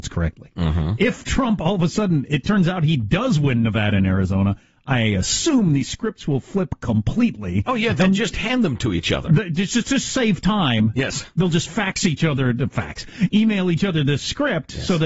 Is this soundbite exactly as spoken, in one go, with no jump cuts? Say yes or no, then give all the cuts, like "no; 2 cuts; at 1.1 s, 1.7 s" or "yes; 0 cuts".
yes; 0 cuts